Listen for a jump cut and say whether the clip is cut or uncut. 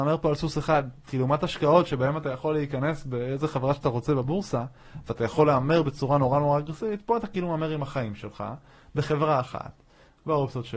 uncut